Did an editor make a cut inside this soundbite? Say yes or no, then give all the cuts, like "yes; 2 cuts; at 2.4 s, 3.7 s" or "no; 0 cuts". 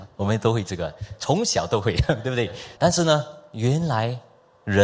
yes; 1 cut; at 2.8 s